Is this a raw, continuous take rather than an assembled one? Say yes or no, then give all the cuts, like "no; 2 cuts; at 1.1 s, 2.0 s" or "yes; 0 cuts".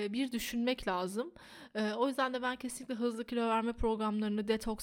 yes; 0 cuts